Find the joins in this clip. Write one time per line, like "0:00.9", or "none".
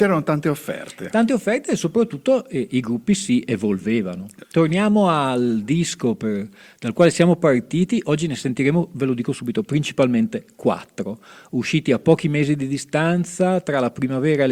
0:04.4